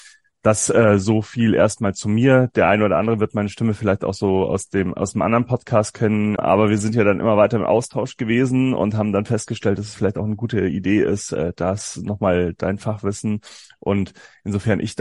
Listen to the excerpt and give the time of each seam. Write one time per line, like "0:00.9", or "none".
0:06.4